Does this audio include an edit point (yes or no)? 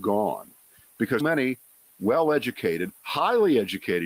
yes